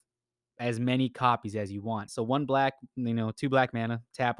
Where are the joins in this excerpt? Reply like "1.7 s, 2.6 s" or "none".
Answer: 2.1 s